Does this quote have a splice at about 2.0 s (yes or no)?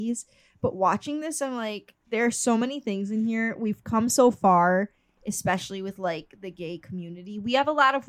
yes